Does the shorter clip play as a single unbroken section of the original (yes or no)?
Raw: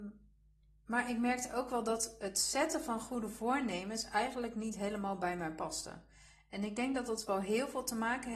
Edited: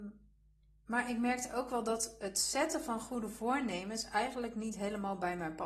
yes